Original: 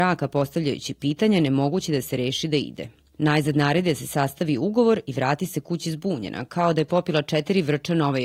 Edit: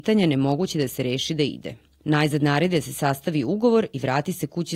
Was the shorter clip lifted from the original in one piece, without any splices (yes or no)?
yes